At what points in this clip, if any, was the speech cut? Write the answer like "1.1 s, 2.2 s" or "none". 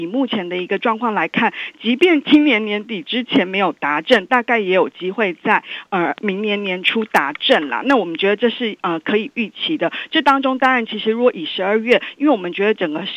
none